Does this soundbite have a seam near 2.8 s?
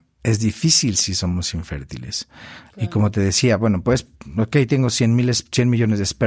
no; 0 cuts

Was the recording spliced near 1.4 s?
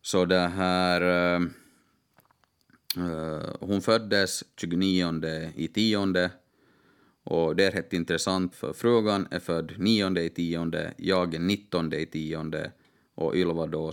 no; 1 cut; at 8.5 s

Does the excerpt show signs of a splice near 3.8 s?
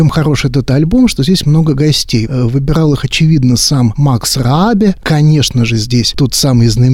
no; 2 cuts; at 2.3 s, 5.0 s

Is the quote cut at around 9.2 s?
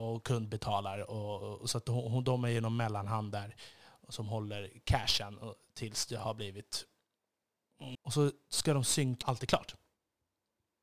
yes; 2 cuts; at 7.9 s, 9.2 s

